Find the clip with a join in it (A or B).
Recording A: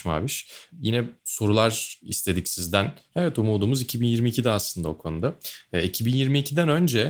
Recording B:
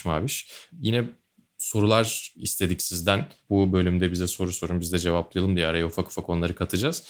A